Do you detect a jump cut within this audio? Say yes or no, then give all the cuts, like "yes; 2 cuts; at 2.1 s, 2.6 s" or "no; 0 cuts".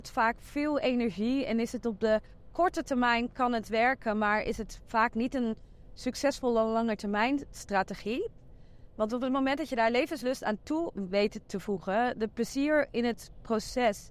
no; 0 cuts